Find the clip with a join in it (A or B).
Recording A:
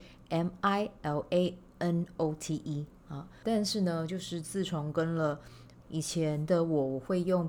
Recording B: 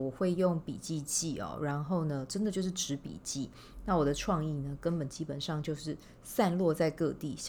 A